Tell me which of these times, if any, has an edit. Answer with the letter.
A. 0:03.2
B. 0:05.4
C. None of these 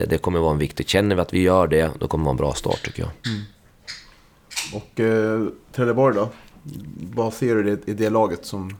A